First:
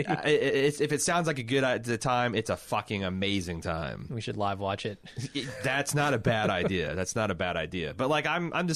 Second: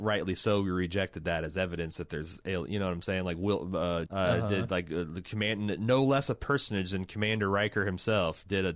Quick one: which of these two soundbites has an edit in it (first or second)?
second